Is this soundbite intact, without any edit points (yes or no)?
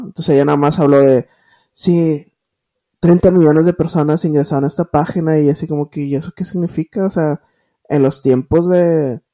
yes